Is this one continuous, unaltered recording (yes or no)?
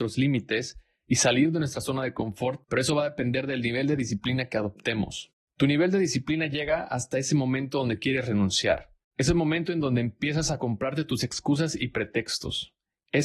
no